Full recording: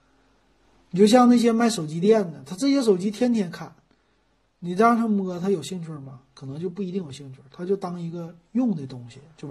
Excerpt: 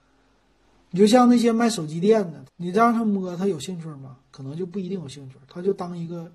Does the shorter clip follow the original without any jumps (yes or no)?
no